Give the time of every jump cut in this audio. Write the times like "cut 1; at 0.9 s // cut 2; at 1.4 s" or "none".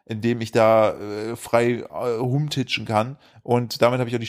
cut 1; at 3.3 s